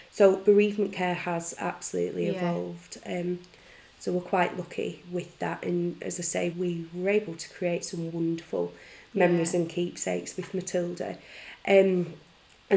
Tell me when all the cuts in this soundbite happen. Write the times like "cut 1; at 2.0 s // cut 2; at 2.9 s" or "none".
cut 1; at 6.5 s // cut 2; at 8.1 s

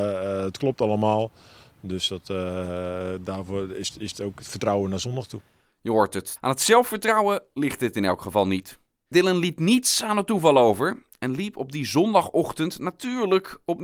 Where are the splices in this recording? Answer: cut 1; at 6.4 s // cut 2; at 9.1 s

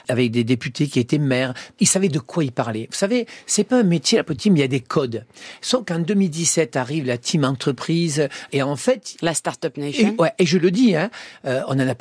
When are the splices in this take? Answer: cut 1; at 8.5 s

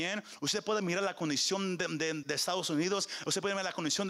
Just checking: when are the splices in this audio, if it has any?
cut 1; at 2.2 s

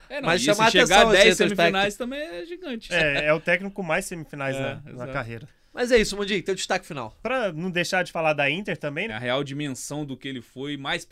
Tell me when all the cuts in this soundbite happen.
cut 1; at 2.9 s // cut 2; at 9.1 s

